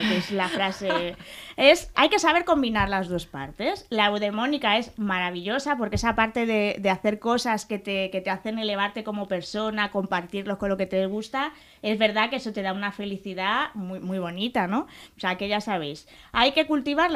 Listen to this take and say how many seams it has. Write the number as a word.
two